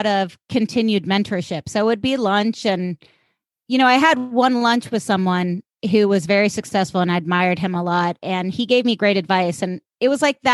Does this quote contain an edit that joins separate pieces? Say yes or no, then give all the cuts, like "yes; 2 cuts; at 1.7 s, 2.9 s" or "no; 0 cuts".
no; 0 cuts